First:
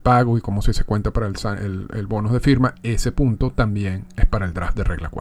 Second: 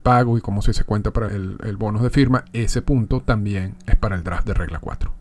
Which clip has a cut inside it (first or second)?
second